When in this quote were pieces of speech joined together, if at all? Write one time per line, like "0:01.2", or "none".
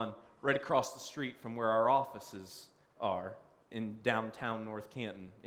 0:03.7